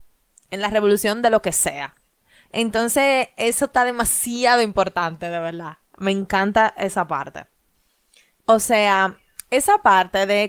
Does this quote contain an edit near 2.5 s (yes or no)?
yes